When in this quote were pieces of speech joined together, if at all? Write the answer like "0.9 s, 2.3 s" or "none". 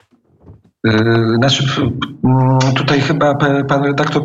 none